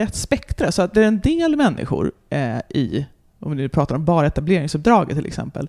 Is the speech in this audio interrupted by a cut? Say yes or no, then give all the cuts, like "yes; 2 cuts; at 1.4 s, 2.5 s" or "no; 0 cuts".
no; 0 cuts